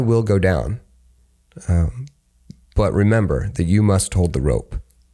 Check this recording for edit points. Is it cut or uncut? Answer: uncut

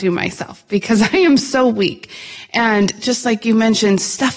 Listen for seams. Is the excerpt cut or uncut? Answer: uncut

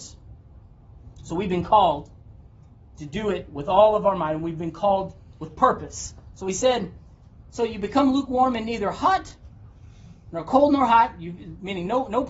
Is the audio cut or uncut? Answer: uncut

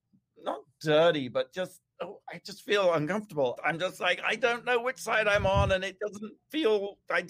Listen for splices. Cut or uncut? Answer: cut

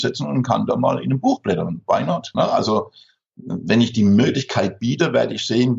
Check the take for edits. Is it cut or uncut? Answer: cut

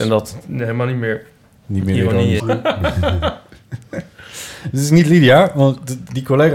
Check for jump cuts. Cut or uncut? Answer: cut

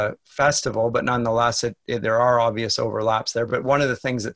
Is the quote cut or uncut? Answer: uncut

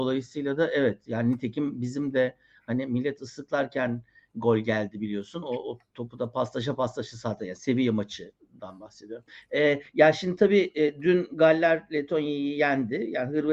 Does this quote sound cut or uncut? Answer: uncut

